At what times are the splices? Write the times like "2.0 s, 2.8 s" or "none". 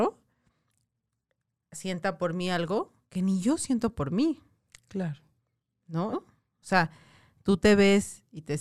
6.1 s